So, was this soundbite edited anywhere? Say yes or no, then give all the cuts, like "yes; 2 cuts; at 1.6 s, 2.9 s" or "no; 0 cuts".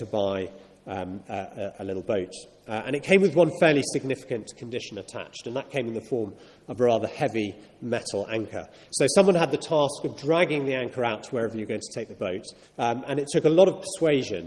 yes; 2 cuts; at 8.9 s, 12.6 s